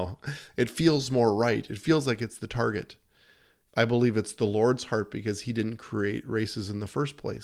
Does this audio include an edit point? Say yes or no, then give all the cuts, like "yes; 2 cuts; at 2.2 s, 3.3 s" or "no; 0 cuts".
yes; 1 cut; at 3.7 s